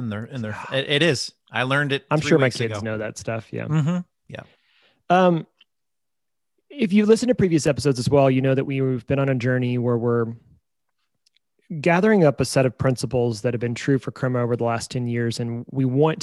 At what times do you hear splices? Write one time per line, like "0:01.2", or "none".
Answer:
none

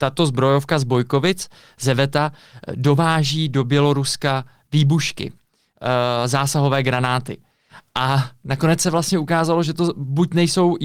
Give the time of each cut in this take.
none

